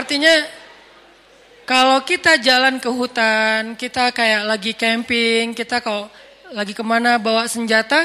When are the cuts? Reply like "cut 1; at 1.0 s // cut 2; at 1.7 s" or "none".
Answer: none